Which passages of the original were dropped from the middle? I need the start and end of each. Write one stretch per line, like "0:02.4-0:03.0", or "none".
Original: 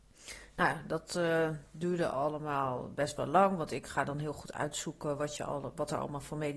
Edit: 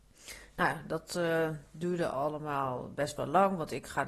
none